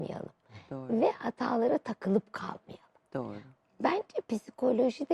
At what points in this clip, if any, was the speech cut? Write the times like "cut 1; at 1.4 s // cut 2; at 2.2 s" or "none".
none